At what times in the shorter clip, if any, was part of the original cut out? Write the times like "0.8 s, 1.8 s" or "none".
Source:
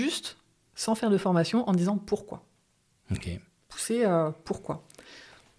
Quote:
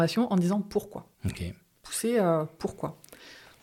1.1 s